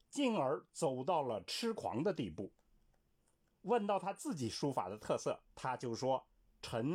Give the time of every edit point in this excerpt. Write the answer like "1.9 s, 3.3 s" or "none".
3.5 s, 5.5 s